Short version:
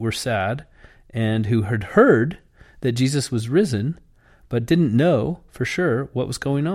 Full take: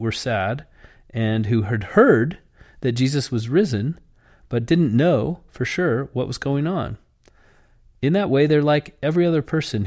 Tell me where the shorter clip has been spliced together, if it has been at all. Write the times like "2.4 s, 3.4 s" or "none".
none